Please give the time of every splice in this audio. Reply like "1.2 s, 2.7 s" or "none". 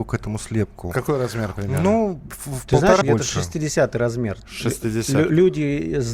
3.0 s